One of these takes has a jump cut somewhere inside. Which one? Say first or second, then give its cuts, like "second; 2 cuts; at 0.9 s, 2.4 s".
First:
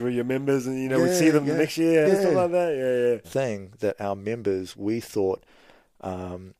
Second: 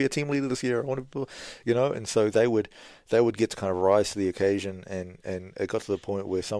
first; 3 cuts; at 2.0 s, 3.2 s, 4.7 s